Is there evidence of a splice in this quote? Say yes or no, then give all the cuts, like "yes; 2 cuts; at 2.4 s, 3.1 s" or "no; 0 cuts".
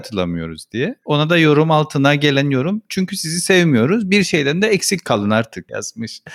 no; 0 cuts